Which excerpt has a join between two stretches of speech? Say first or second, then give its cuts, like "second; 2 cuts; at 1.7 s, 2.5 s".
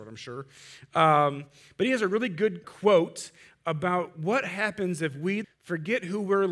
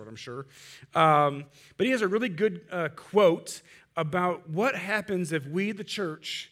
first; 2 cuts; at 2.6 s, 5.4 s